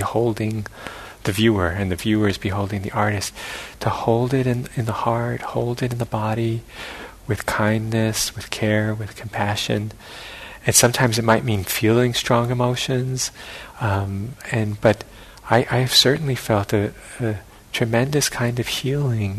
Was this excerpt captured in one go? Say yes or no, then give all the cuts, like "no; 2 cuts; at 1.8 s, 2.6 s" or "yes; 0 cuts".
no; 1 cut; at 13.7 s